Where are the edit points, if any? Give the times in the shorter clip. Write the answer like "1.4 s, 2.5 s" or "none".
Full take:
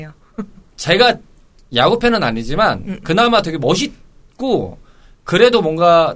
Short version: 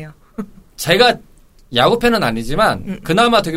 none